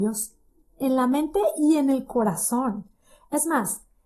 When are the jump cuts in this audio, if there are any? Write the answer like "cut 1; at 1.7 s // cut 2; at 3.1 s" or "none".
none